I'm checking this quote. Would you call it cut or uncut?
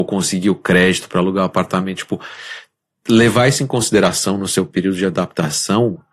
uncut